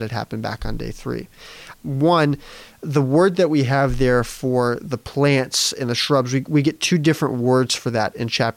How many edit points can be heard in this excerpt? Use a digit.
1